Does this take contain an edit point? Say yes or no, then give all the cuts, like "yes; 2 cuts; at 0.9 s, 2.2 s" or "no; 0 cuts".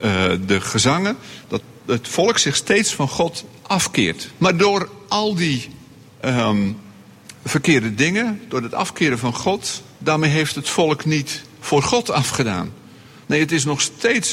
yes; 1 cut; at 4.4 s